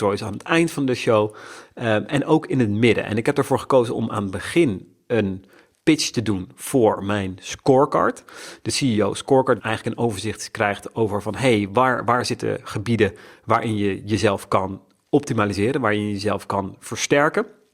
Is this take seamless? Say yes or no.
no